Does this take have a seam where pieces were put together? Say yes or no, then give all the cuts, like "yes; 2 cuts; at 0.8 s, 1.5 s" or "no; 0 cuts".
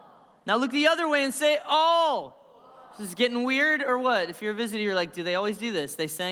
no; 0 cuts